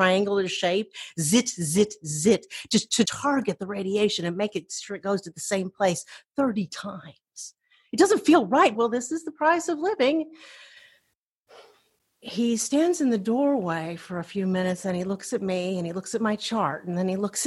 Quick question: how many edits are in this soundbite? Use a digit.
3